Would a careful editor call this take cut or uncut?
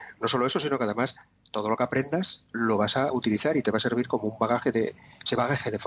uncut